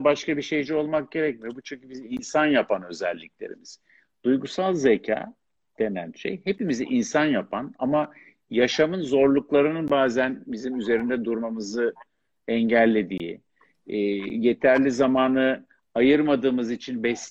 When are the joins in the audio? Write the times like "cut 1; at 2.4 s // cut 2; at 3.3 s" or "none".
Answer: none